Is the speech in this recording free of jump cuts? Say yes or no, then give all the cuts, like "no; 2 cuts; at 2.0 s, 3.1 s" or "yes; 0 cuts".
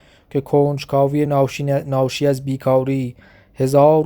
yes; 0 cuts